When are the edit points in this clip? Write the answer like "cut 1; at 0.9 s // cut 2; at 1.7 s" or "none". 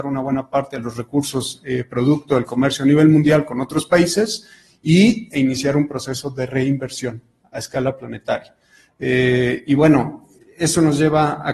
cut 1; at 8.9 s